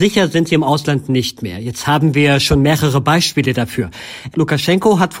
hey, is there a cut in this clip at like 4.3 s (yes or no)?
yes